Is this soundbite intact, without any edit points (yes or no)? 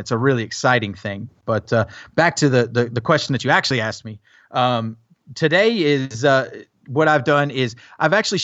yes